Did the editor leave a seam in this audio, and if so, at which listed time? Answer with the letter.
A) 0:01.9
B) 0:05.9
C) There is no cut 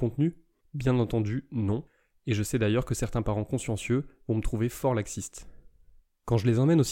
C